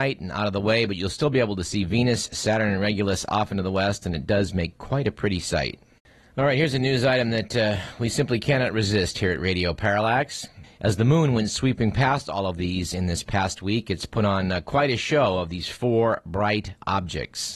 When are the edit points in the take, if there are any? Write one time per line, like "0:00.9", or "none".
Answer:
0:10.6